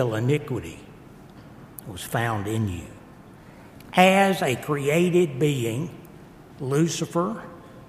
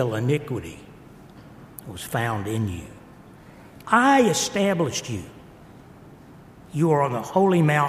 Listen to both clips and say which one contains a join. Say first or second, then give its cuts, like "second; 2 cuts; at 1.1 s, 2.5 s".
second; 1 cut; at 3.8 s